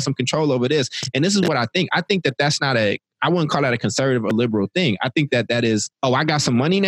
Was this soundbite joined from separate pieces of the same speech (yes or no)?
yes